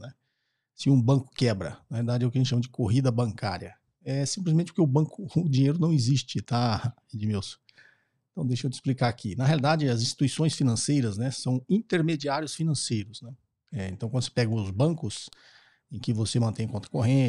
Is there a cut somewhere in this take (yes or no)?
no